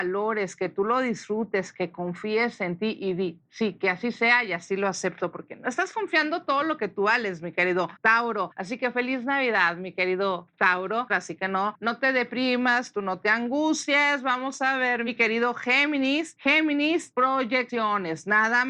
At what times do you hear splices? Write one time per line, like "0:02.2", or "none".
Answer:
0:11.1